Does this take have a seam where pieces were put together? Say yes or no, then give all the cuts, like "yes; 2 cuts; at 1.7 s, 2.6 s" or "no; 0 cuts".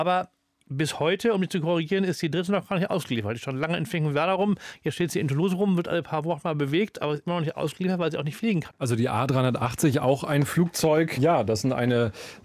yes; 2 cuts; at 8.7 s, 11.2 s